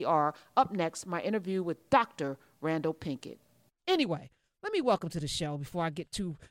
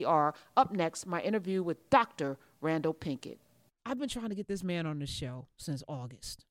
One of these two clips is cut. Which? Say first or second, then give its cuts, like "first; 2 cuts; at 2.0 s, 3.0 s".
first; 1 cut; at 3.8 s